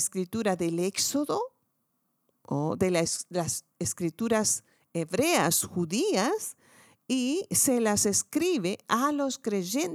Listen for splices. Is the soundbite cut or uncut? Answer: uncut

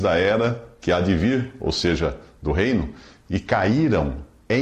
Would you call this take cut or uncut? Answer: uncut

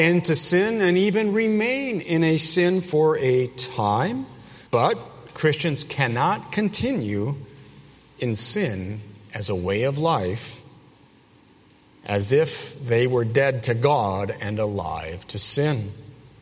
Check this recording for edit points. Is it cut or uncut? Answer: cut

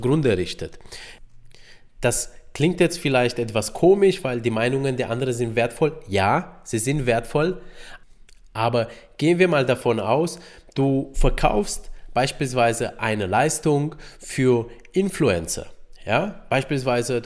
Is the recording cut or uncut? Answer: uncut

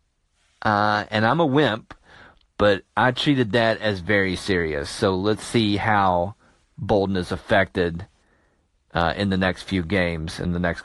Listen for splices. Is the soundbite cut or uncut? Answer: uncut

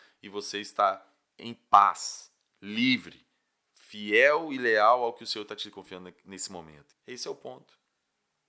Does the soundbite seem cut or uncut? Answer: cut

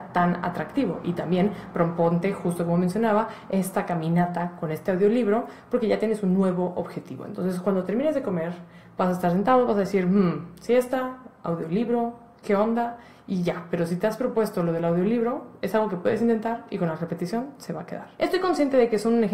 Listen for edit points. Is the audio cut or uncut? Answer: uncut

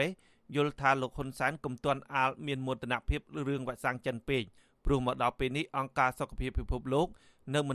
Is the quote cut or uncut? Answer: uncut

